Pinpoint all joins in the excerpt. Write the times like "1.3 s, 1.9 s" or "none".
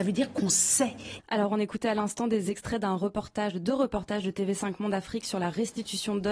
1.2 s